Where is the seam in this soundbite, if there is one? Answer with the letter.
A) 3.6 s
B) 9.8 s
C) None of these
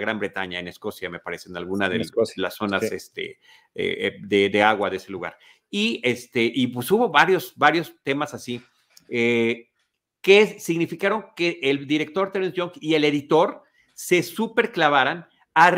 C